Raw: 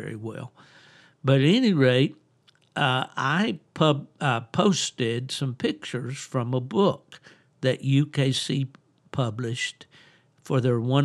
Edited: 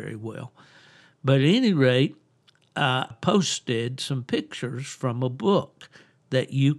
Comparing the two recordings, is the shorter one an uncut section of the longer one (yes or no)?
no